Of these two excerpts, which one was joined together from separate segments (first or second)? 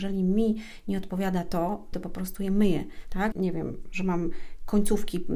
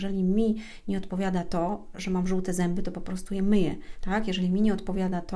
first